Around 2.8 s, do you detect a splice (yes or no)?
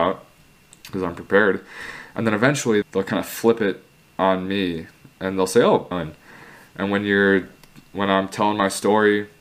yes